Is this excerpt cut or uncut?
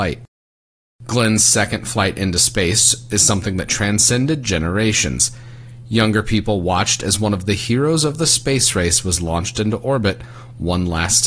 uncut